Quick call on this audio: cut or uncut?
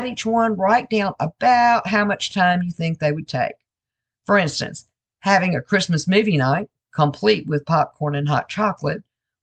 uncut